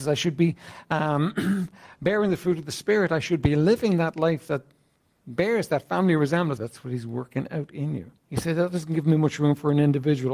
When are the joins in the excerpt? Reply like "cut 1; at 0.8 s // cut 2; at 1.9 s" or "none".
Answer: cut 1; at 6.6 s // cut 2; at 8.2 s